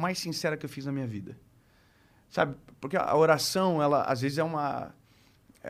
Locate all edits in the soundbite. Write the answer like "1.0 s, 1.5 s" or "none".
none